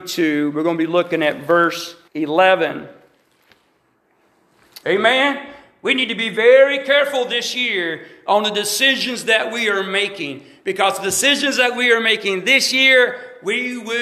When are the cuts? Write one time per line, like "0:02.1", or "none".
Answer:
0:02.1
0:04.8